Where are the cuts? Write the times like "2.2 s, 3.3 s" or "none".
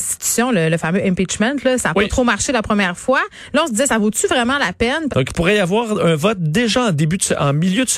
5.1 s